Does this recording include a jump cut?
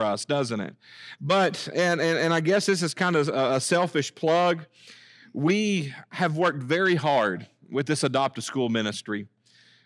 yes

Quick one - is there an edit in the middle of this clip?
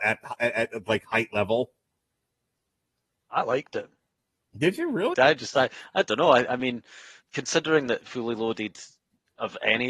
yes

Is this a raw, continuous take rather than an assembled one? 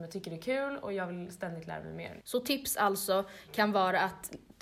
no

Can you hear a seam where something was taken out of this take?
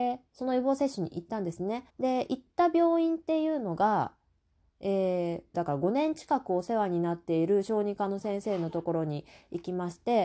yes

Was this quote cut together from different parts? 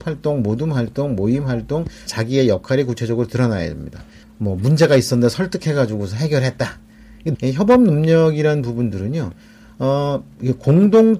yes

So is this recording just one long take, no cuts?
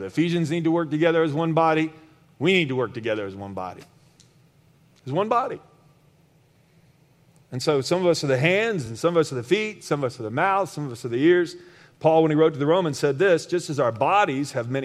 yes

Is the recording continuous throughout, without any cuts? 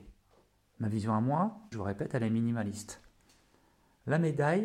no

